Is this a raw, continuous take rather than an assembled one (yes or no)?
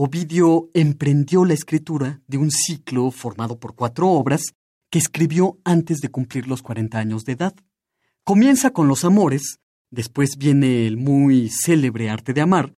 yes